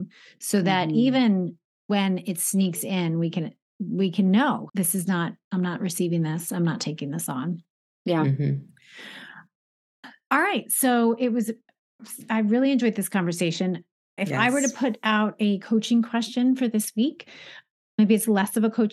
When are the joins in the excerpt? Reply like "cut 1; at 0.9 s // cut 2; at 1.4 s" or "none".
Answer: cut 1; at 4.7 s